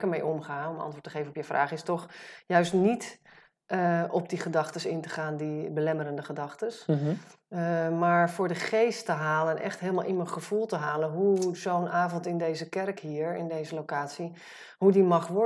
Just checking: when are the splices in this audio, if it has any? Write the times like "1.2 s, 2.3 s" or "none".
none